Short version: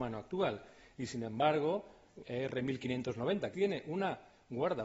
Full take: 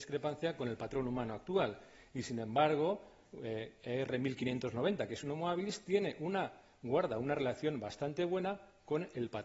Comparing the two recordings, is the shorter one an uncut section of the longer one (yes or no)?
no